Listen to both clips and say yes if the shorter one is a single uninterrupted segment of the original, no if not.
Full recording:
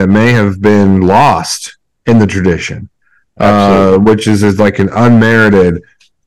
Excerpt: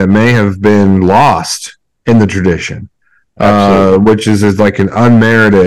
yes